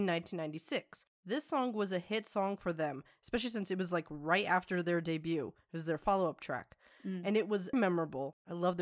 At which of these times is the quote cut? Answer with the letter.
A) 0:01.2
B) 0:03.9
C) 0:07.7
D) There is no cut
C